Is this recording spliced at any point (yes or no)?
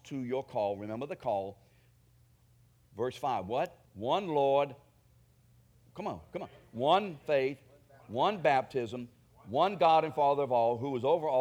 yes